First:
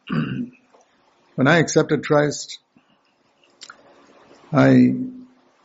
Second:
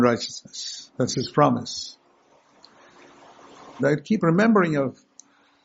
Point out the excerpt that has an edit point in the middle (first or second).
second